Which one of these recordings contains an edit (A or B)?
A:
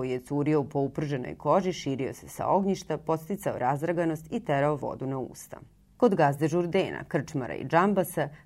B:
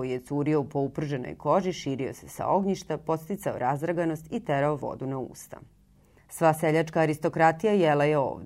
A